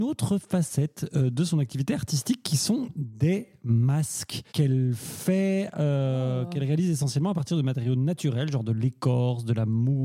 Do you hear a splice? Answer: yes; 1 cut; at 4.5 s

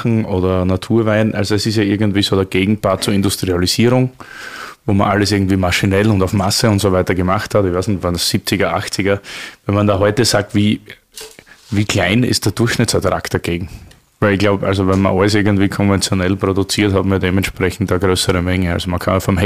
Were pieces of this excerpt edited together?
no; 0 cuts

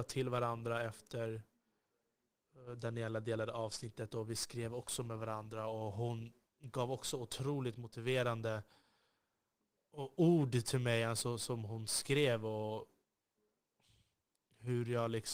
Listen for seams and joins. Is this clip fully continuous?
yes; 0 cuts

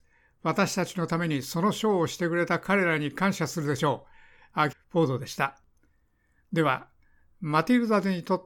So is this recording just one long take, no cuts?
no; 1 cut; at 4.7 s

